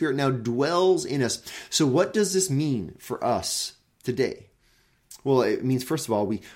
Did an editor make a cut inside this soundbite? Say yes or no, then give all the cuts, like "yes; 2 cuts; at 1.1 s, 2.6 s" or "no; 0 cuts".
no; 0 cuts